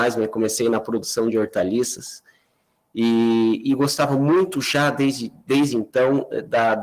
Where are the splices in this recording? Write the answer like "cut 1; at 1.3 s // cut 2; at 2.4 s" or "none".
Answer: none